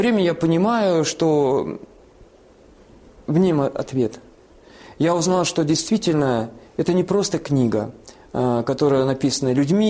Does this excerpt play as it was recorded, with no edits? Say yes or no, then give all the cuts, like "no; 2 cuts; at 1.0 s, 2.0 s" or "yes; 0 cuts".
yes; 0 cuts